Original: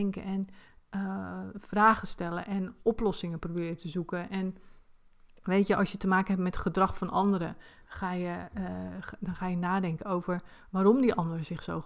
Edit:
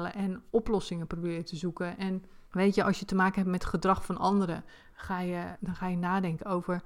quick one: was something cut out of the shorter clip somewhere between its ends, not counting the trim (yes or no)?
yes